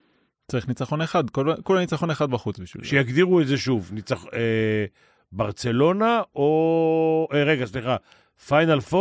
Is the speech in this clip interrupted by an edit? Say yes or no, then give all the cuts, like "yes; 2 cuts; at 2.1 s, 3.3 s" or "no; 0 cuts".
no; 0 cuts